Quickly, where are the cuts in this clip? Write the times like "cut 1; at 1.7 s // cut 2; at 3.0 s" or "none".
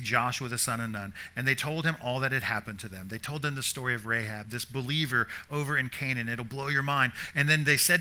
none